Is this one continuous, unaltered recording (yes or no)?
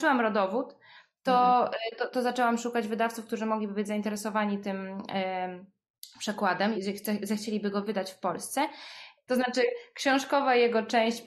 no